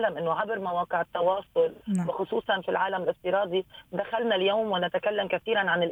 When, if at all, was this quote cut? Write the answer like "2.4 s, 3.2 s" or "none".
none